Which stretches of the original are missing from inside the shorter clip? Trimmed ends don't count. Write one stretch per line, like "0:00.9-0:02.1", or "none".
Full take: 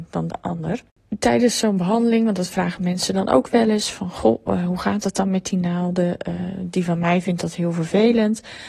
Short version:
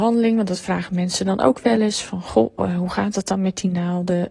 none